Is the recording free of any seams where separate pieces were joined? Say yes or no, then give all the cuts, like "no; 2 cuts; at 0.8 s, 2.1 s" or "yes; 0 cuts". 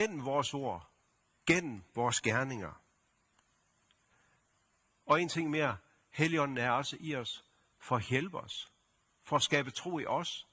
yes; 0 cuts